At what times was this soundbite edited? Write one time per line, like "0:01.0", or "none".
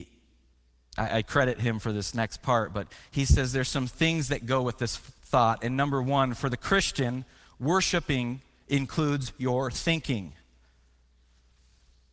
none